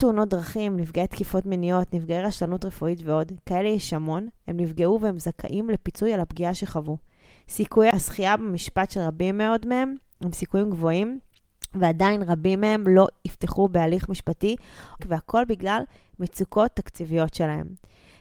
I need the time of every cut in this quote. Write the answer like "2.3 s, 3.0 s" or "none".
15.0 s